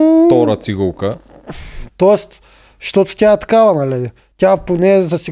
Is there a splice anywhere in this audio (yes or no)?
yes